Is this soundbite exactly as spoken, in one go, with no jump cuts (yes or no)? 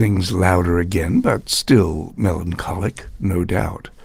yes